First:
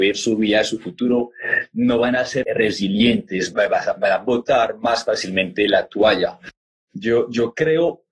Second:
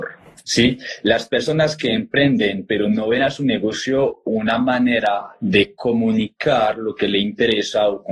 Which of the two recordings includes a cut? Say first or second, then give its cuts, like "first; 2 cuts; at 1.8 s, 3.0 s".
first; 2 cuts; at 2.4 s, 3.5 s